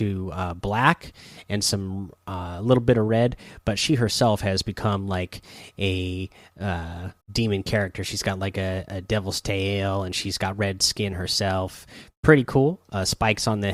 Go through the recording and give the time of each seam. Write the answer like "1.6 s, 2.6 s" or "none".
7.2 s